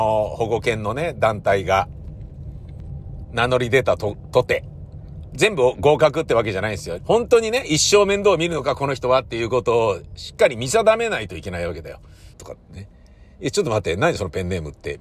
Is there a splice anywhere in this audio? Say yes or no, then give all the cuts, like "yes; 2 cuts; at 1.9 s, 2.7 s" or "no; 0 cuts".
yes; 2 cuts; at 7.0 s, 12.3 s